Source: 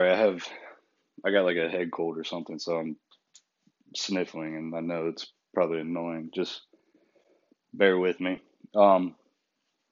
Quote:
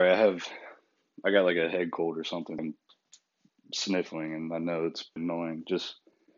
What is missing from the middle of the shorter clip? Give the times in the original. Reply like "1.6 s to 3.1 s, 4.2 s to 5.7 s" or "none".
2.6 s to 2.8 s, 5.4 s to 5.8 s